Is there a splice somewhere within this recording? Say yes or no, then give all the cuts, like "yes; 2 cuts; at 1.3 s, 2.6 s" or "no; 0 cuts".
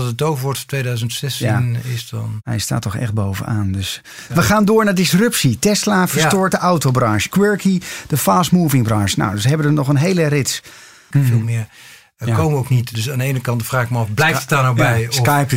yes; 2 cuts; at 7.3 s, 11.1 s